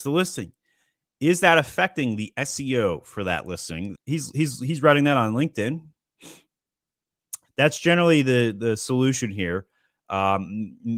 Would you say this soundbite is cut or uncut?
cut